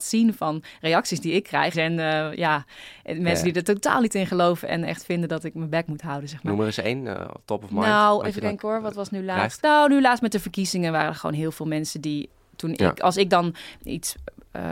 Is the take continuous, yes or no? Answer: no